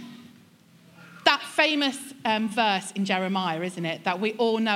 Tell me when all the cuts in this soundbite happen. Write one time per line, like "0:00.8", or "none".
none